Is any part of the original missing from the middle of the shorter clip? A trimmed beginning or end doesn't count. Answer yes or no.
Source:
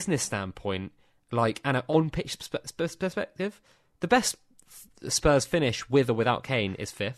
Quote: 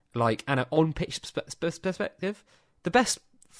no